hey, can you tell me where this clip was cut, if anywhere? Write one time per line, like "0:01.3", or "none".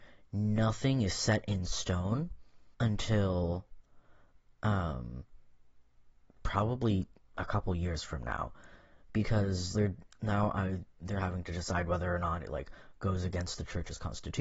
0:02.7
0:09.7